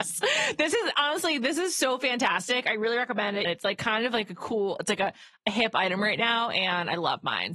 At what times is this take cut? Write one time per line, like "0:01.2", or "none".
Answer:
0:03.4